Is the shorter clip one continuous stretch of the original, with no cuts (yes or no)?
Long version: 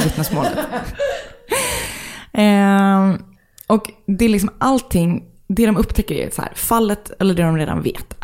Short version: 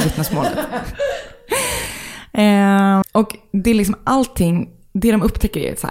no